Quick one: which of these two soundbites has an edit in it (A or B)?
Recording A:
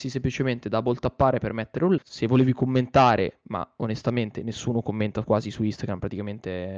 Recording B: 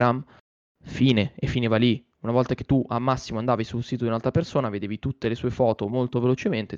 A